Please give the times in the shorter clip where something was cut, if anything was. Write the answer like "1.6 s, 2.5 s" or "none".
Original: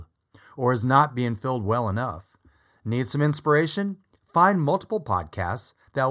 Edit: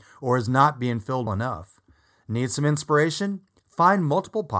1.3 s